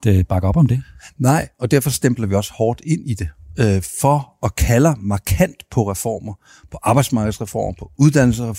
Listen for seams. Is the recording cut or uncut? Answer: uncut